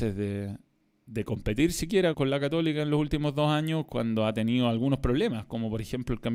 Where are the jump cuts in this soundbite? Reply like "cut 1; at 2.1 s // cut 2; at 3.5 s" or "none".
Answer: cut 1; at 2.1 s